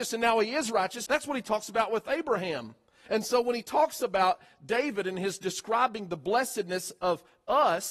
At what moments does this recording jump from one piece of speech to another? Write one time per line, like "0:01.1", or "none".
0:01.1
0:03.1